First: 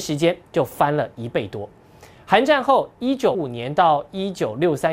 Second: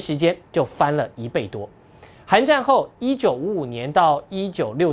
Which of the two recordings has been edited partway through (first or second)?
first